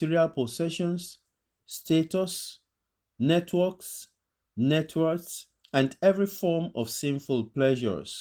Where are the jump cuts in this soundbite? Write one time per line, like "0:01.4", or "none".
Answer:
none